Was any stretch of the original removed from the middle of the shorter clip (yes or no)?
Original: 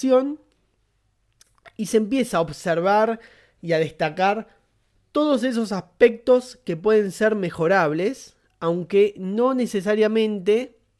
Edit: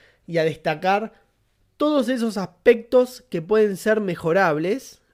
no